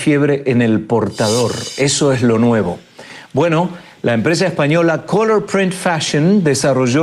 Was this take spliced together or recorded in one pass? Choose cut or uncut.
uncut